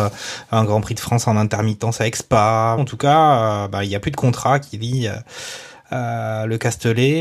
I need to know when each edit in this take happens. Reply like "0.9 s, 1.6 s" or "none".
2.8 s